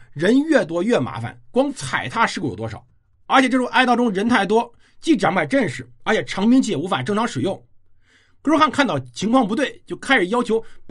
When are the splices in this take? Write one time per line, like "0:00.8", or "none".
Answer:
none